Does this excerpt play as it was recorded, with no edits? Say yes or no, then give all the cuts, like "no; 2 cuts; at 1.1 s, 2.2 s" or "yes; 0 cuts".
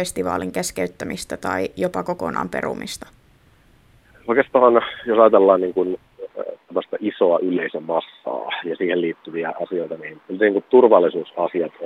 yes; 0 cuts